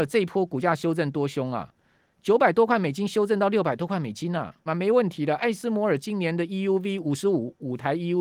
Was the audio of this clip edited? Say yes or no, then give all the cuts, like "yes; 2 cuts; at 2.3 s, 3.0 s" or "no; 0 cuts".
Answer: yes; 1 cut; at 4.7 s